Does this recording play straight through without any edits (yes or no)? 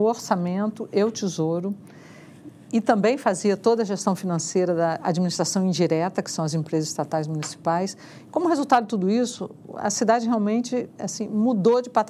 yes